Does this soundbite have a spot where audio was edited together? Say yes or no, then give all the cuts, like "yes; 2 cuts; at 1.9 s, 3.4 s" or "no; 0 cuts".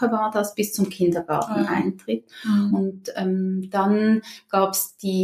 no; 0 cuts